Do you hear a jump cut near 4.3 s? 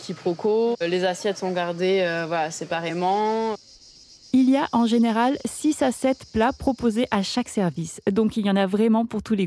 no; 0 cuts

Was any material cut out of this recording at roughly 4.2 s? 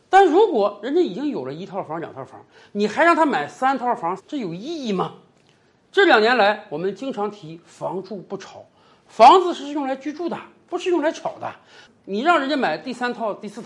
yes; 1 cut; at 4.2 s

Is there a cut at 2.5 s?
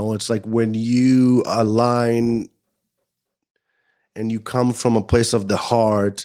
no; 0 cuts

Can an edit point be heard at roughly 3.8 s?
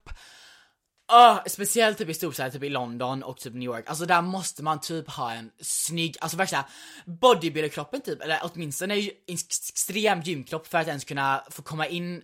no; 0 cuts

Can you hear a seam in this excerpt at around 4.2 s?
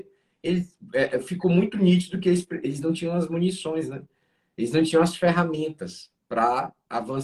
no; 0 cuts

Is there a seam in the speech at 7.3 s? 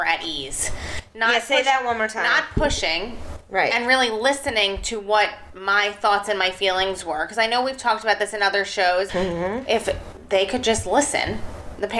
no; 1 cut; at 9.1 s

